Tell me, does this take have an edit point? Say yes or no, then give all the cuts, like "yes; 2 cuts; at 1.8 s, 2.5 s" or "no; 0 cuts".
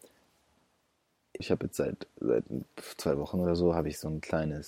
yes; 1 cut; at 1.4 s